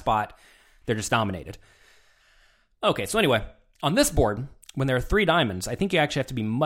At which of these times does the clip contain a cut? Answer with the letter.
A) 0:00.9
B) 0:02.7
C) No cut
C